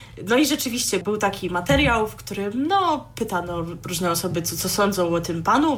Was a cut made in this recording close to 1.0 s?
yes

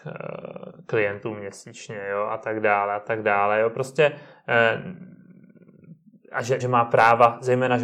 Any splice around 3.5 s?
no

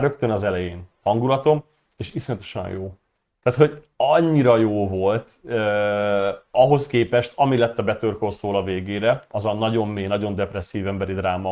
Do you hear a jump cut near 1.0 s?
yes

